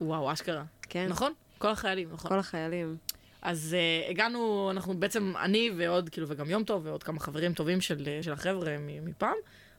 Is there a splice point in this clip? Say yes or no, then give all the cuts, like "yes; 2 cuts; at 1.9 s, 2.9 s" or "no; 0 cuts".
yes; 1 cut; at 8.2 s